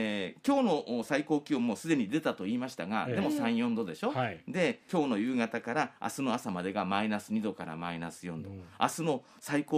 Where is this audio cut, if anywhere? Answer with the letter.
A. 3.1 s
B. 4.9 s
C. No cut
B